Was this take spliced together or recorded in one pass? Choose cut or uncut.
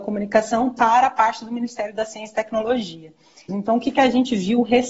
cut